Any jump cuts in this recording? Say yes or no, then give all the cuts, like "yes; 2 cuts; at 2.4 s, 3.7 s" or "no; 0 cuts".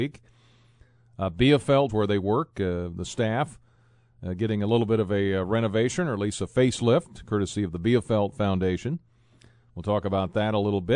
yes; 1 cut; at 1.9 s